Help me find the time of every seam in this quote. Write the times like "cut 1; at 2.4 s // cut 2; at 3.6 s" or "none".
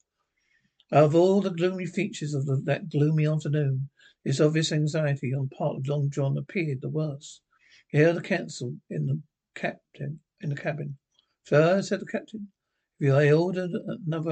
none